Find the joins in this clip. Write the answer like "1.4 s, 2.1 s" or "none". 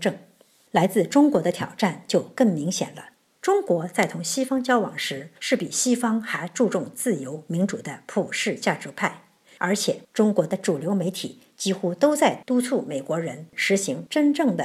none